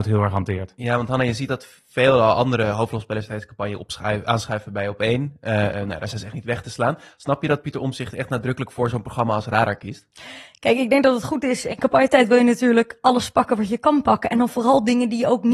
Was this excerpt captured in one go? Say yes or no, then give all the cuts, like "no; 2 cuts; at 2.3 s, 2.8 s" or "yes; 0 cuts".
yes; 0 cuts